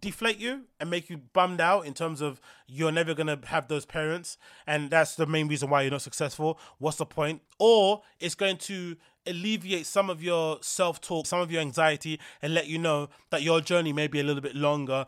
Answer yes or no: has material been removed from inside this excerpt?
yes